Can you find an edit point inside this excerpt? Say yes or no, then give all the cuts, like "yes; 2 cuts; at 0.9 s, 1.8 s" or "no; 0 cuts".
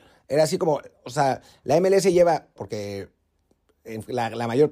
yes; 1 cut; at 2.6 s